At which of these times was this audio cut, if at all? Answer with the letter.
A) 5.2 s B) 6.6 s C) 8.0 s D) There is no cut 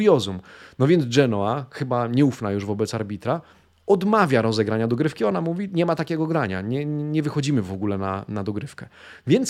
D